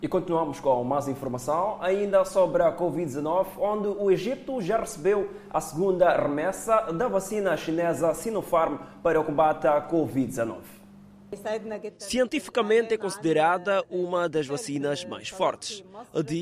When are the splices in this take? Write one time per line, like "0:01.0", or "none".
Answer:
none